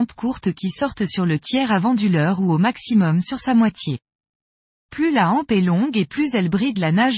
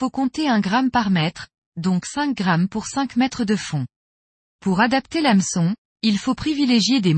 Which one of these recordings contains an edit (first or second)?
second